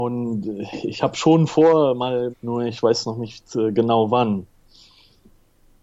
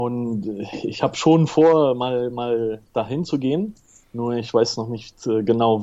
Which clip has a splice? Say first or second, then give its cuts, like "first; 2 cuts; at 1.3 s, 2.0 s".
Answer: first; 1 cut; at 2.3 s